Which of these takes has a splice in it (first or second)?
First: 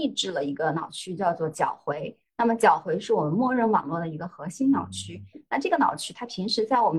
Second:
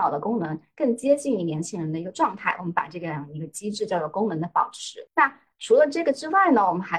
second